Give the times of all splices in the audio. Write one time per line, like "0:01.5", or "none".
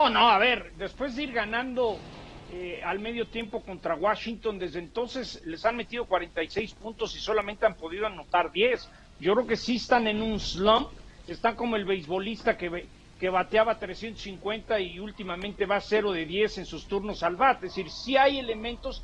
none